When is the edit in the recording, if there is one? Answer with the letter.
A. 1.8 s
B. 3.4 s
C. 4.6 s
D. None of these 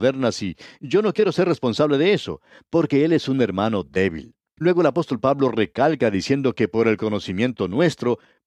C